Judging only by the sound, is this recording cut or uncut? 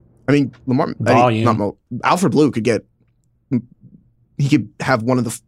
uncut